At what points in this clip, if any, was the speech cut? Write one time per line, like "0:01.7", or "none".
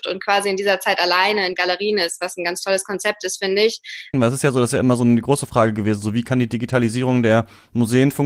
0:04.1